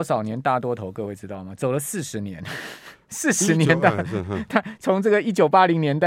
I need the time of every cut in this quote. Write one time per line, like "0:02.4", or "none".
none